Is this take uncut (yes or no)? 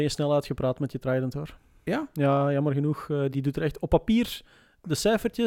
no